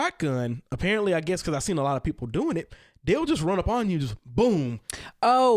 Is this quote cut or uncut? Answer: uncut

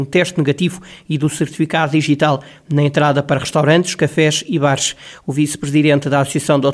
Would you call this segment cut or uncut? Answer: uncut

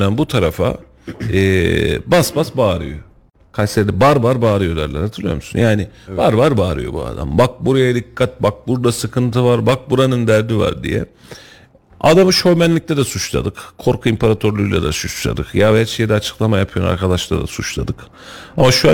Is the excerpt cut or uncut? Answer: uncut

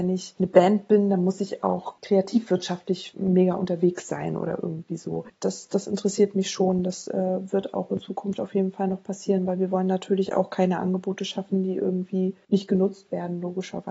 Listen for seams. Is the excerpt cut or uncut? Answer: cut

